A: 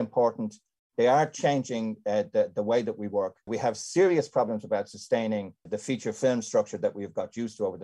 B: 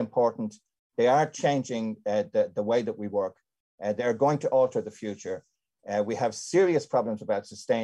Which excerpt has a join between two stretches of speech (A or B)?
A